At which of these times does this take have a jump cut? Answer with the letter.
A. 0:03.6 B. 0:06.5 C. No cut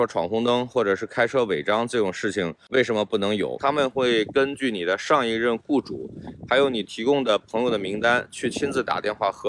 A